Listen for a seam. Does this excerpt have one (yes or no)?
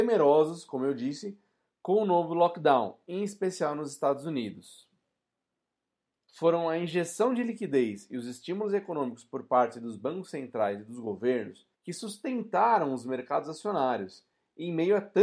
yes